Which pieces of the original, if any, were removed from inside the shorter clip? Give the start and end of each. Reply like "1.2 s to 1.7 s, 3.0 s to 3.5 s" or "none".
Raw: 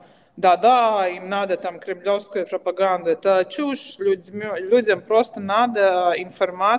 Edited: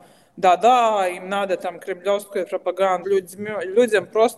3.0 s to 4.0 s